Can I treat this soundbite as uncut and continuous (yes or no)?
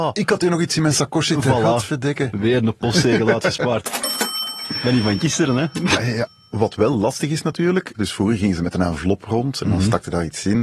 no